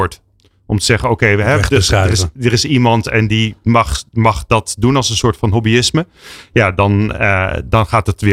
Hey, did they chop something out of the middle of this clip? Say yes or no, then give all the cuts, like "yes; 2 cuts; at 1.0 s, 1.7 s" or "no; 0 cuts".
no; 0 cuts